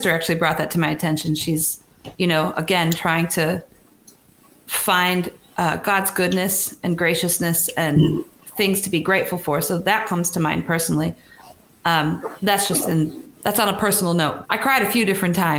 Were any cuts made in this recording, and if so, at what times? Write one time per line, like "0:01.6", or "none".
0:02.1
0:14.4